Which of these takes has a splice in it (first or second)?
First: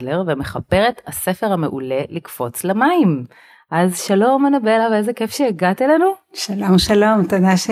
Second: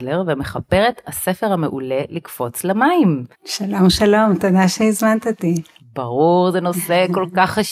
second